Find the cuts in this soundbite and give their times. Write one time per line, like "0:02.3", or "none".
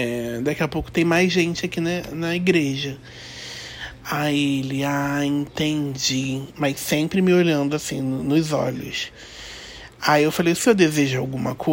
none